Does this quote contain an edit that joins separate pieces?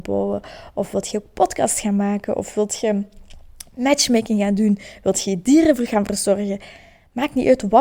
no; 0 cuts

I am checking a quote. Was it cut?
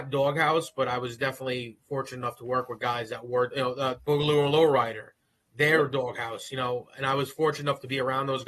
yes; 1 cut; at 4.0 s

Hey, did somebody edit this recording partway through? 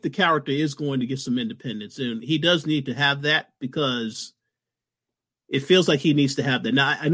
no; 0 cuts

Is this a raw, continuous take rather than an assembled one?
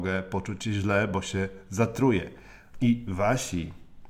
no; 1 cut; at 2.7 s

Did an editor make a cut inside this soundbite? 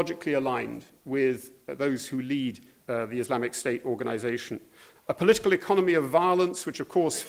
yes; 2 cuts; at 2.8 s, 5.0 s

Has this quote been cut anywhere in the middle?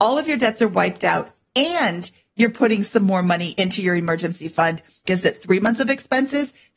yes; 1 cut; at 5.1 s

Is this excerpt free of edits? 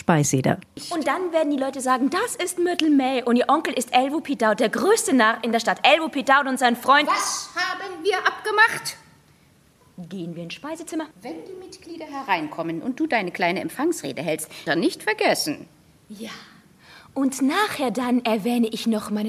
no; 3 cuts; at 9.8 s, 11.1 s, 14.7 s

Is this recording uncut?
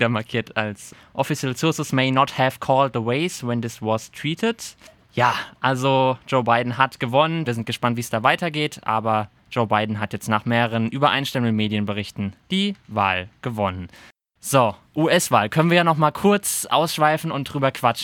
no; 1 cut; at 7.5 s

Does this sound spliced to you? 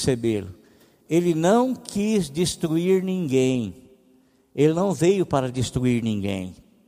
no; 0 cuts

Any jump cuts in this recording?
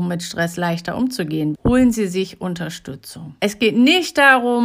yes; 2 cuts; at 1.5 s, 3.4 s

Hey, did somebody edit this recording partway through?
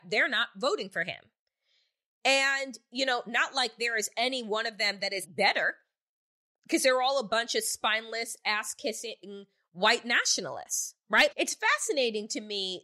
yes; 2 cuts; at 5.2 s, 11.3 s

